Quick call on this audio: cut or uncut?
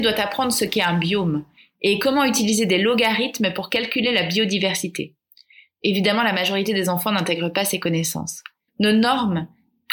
cut